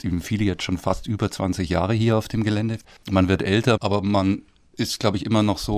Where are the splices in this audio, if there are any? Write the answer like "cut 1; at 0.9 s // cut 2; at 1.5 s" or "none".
cut 1; at 3.8 s